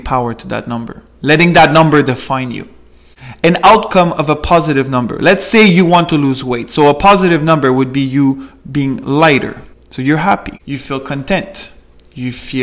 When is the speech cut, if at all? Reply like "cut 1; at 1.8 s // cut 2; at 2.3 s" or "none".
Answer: cut 1; at 9.7 s